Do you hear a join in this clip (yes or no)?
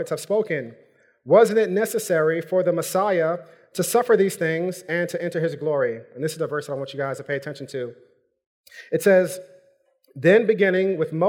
no